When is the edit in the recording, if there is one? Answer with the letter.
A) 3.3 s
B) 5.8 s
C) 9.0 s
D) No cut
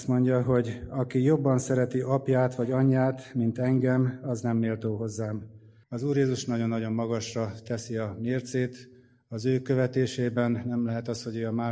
B